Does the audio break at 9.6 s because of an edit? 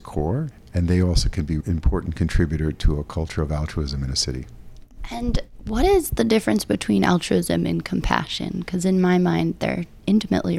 no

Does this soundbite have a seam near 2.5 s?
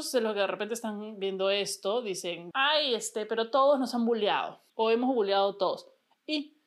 yes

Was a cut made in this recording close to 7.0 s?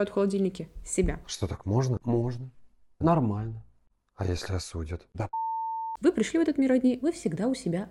yes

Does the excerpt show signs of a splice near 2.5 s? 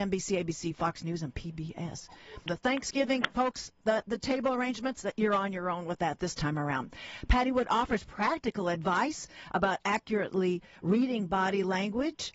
yes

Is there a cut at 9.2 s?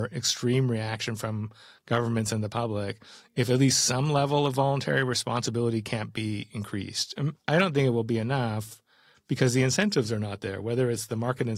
no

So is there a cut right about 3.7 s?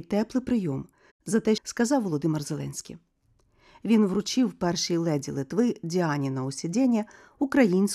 no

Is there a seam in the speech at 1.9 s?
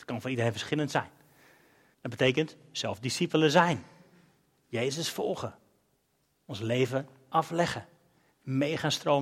yes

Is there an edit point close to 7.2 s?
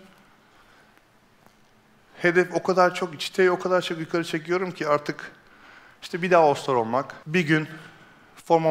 yes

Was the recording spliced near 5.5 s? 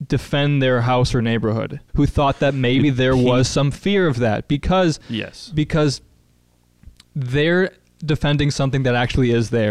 no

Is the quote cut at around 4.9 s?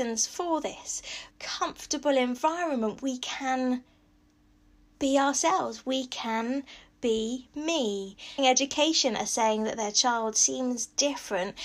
no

